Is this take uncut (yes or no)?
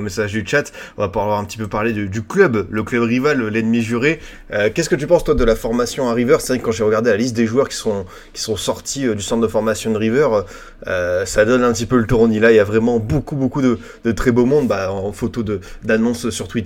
yes